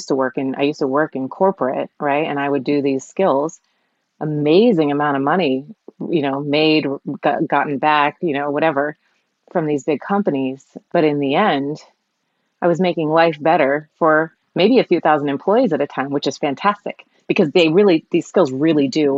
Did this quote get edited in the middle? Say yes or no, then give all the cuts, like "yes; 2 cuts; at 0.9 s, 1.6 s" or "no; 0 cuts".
no; 0 cuts